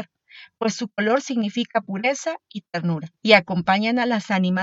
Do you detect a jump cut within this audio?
yes; 1 cut; at 3.2 s

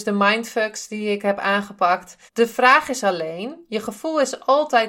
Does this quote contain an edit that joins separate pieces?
yes; 1 cut; at 2.3 s

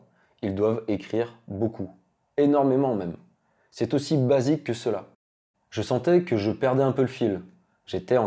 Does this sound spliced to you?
yes; 1 cut; at 5.5 s

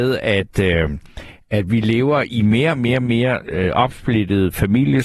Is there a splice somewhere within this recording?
no; 0 cuts

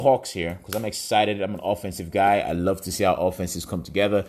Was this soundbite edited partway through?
no; 0 cuts

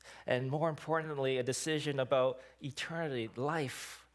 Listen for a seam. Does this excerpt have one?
no; 0 cuts

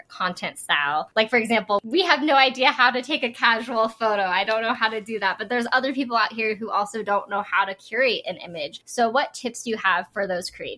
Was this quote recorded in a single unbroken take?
yes; 0 cuts

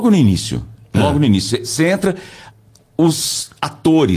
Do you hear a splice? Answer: no; 0 cuts

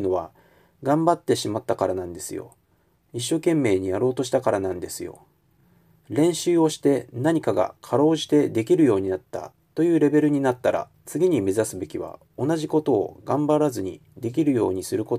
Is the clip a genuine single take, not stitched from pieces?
yes; 0 cuts

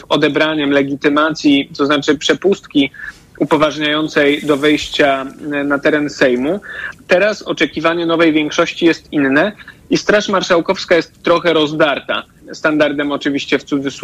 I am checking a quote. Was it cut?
yes; 2 cuts; at 6.9 s, 12.4 s

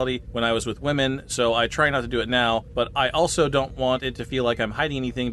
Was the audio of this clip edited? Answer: no; 0 cuts

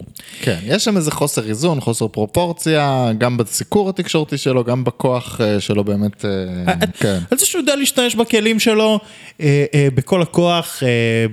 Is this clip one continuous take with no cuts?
no; 1 cut; at 6.9 s

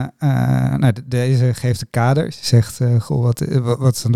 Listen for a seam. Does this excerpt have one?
no; 0 cuts

